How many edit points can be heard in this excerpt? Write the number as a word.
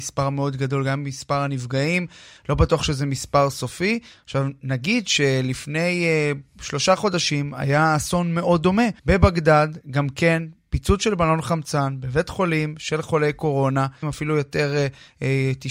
two